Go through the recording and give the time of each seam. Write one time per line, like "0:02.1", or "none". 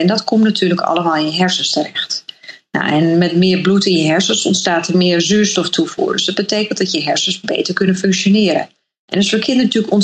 none